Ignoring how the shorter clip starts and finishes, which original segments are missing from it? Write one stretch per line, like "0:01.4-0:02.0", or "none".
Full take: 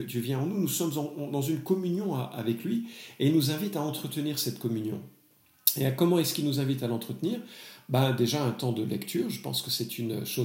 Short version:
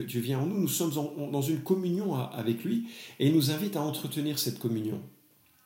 none